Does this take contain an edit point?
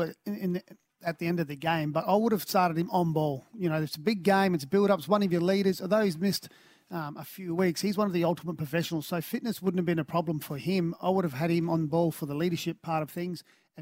no; 0 cuts

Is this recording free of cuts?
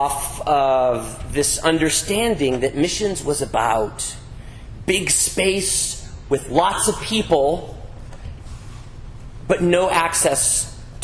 yes; 0 cuts

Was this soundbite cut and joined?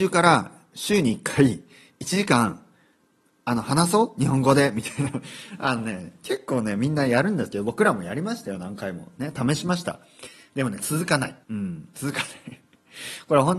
yes; 1 cut; at 11.4 s

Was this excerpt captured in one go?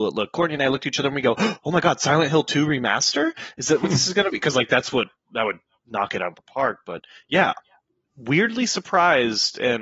yes; 0 cuts

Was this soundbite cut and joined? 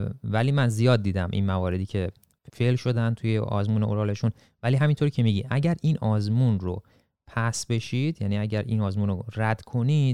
yes; 1 cut; at 2.5 s

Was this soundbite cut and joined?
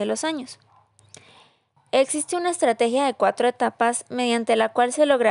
yes; 1 cut; at 1.8 s

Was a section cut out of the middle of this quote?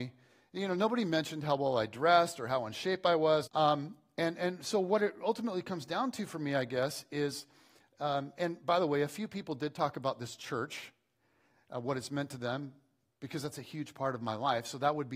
yes; 1 cut; at 3.5 s

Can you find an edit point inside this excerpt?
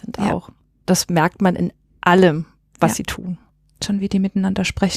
no; 0 cuts

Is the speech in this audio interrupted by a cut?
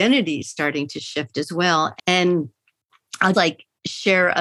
yes; 2 cuts; at 2.0 s, 3.3 s

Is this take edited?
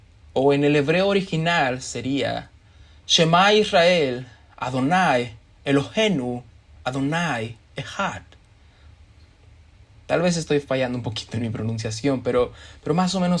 no; 0 cuts

